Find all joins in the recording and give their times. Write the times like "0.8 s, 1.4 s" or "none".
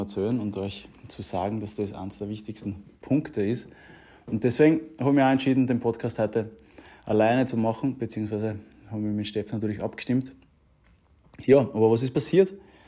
none